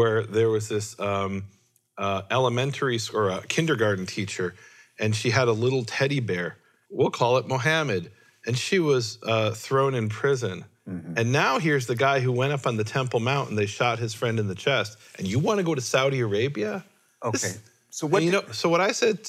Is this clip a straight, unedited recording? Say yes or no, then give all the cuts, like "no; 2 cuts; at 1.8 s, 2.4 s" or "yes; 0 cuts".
no; 1 cut; at 6.9 s